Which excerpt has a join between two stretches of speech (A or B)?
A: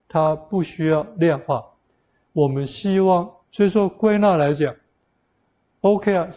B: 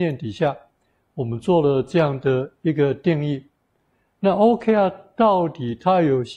A